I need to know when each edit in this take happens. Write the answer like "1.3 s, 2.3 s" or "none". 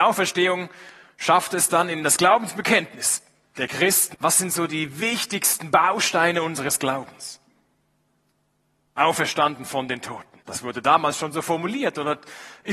4.1 s, 10.4 s